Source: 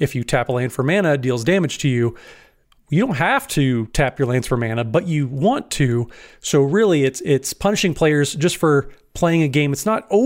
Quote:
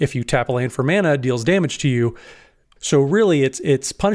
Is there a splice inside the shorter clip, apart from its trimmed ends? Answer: yes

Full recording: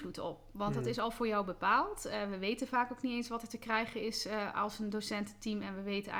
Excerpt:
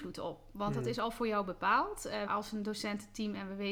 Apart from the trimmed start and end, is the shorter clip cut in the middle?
yes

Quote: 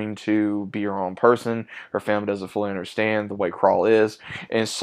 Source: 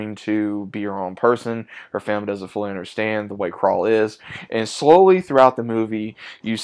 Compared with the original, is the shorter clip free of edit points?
yes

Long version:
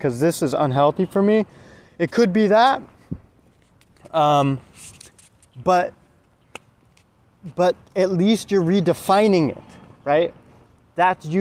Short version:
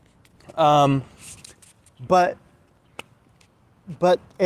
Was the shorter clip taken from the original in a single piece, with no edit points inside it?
yes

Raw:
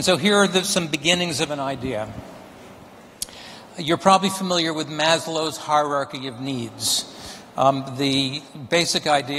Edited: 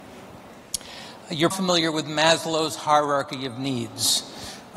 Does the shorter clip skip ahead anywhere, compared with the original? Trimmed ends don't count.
yes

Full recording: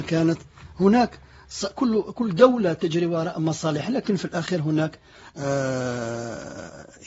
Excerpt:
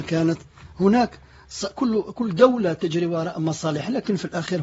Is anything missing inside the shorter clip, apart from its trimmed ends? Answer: no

